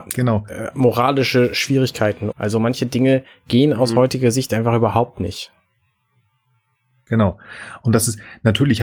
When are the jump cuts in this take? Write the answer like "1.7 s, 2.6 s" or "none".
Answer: 2.3 s